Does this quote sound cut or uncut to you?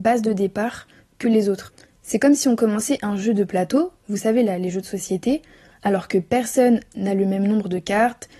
uncut